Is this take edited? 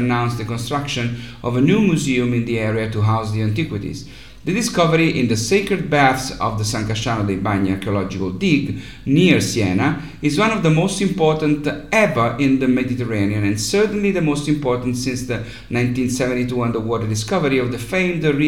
yes; 1 cut; at 4.4 s

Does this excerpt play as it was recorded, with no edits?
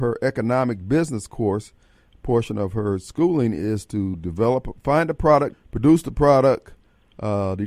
no; 1 cut; at 5.5 s

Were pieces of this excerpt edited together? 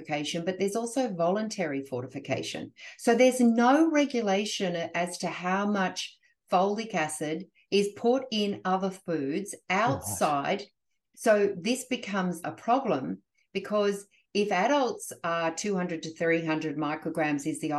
yes; 2 cuts; at 11.1 s, 12.4 s

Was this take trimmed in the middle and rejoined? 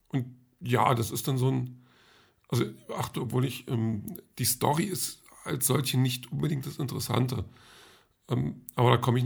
yes; 1 cut; at 3.2 s

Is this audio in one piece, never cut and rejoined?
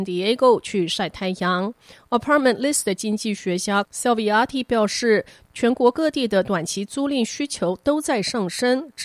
yes; 0 cuts

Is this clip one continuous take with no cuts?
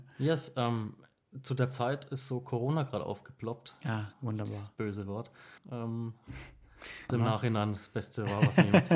no; 3 cuts; at 4.1 s, 5.6 s, 7.1 s

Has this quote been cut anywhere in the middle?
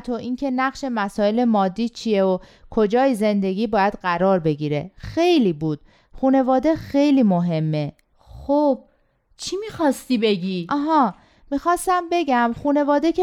no; 0 cuts

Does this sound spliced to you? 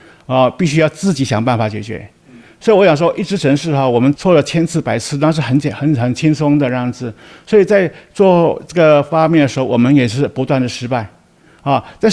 no; 0 cuts

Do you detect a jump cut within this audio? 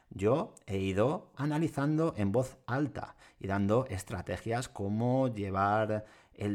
yes; 1 cut; at 1.3 s

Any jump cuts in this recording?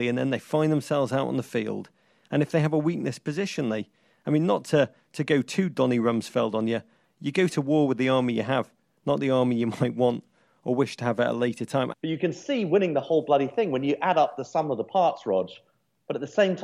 yes; 1 cut; at 11.9 s

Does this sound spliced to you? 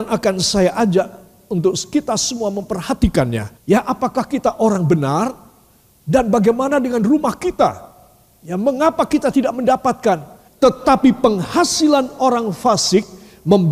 yes; 2 cuts; at 3.6 s, 10.5 s

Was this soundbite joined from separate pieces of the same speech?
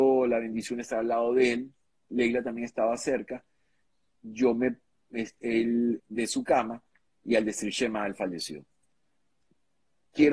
yes; 1 cut; at 6.0 s

